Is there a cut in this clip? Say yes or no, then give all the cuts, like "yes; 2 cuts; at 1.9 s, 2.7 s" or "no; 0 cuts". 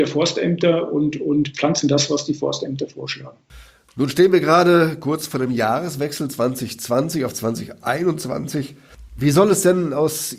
no; 0 cuts